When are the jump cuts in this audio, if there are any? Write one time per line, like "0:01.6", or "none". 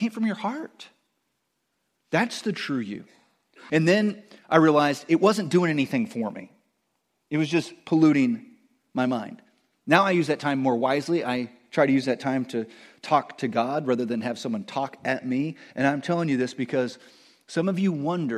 0:03.7